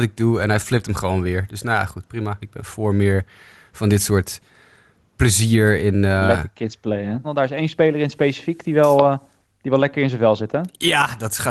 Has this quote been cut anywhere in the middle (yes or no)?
yes